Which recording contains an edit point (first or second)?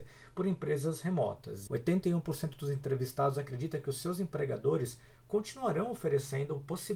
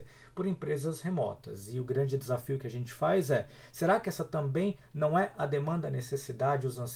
first